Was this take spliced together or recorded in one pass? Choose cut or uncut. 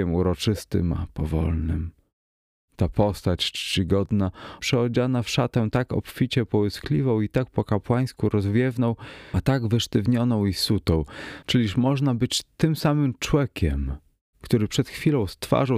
cut